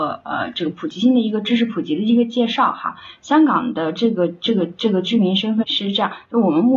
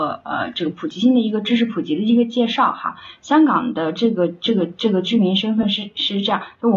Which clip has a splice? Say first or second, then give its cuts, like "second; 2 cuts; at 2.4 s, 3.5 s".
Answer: first; 1 cut; at 5.6 s